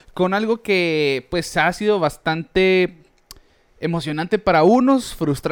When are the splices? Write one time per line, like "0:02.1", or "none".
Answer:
none

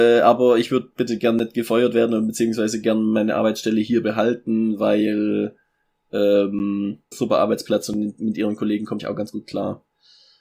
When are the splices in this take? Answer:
0:07.1
0:09.0

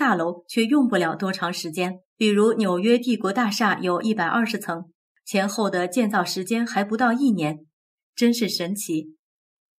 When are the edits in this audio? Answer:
0:02.1

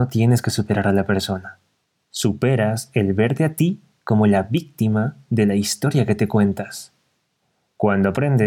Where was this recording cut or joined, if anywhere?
none

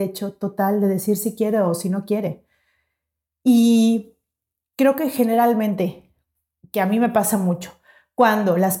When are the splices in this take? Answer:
none

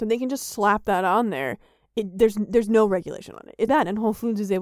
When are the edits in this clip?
0:03.7

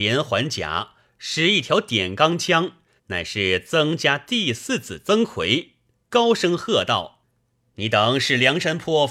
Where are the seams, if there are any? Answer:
0:03.0

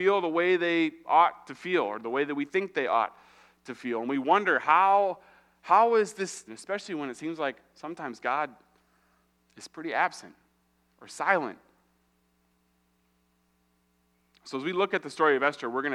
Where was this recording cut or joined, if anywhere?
0:06.5

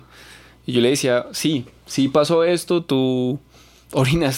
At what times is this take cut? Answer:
none

